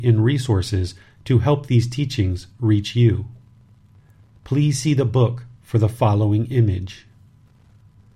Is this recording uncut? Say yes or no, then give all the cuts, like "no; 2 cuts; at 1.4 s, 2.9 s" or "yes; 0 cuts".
yes; 0 cuts